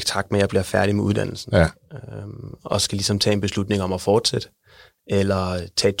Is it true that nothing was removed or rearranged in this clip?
yes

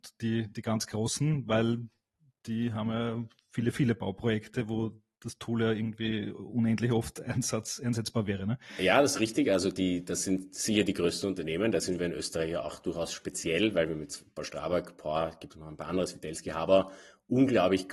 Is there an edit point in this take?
no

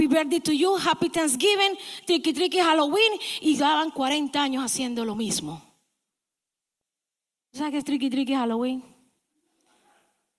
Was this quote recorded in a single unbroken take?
yes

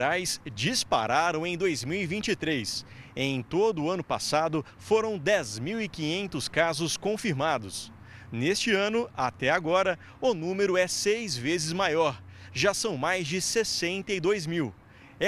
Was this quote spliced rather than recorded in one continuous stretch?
no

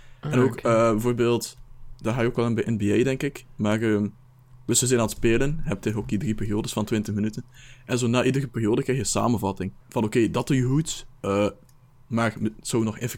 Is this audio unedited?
no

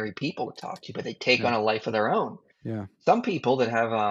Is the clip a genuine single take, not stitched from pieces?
yes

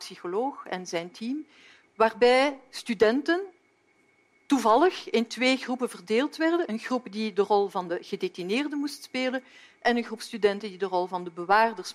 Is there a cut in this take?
no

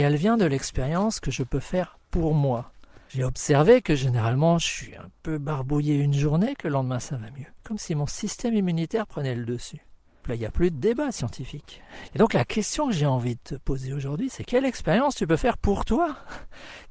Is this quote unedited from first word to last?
no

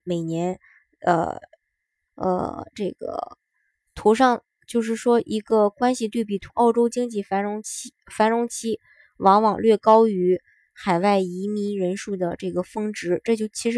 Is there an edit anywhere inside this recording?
yes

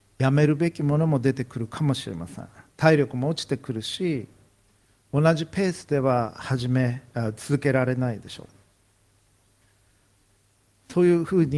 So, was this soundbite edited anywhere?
no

